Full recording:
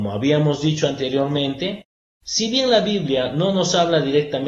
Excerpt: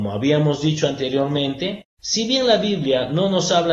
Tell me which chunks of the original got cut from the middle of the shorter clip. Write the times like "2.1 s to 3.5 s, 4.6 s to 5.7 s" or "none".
1.9 s to 2.1 s

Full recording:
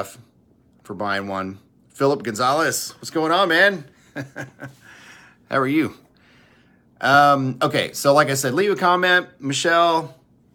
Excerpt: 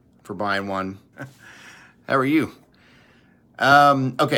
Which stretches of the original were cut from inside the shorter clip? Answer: 1.7 s to 4.5 s

